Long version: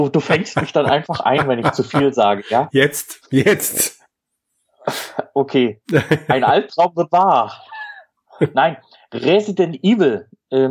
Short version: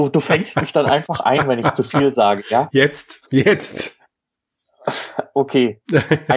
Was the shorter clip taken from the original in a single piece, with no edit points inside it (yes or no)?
yes